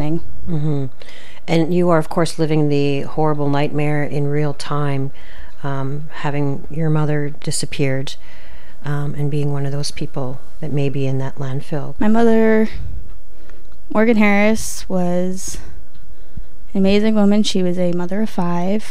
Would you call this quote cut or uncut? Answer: cut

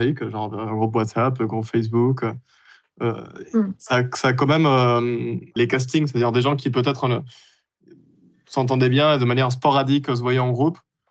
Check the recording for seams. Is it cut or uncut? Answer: cut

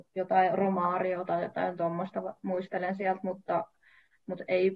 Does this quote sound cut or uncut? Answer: uncut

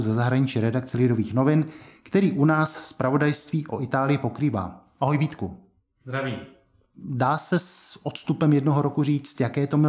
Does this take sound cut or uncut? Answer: cut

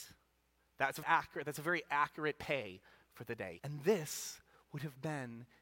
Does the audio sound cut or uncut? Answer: cut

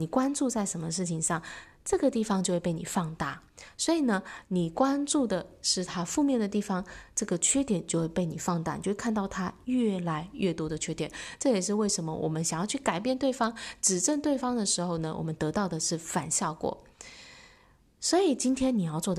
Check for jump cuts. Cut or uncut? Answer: uncut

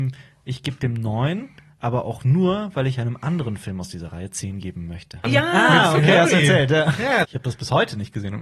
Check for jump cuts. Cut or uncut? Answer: cut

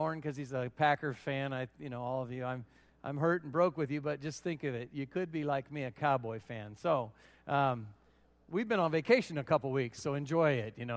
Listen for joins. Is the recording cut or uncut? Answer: uncut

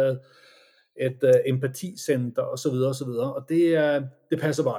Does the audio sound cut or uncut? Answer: uncut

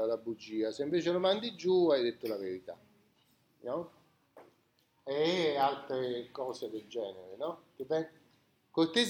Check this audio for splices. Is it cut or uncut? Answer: uncut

